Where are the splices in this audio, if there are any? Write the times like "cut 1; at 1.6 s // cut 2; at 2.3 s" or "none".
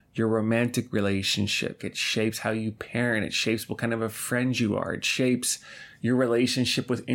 cut 1; at 1.8 s